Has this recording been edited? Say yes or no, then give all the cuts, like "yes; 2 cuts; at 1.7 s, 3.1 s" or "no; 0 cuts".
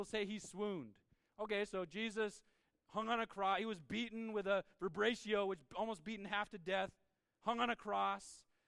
no; 0 cuts